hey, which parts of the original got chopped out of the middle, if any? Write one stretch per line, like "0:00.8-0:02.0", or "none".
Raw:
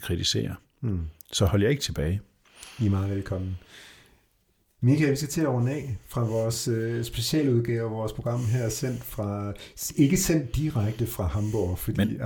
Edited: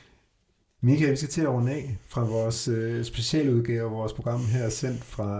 none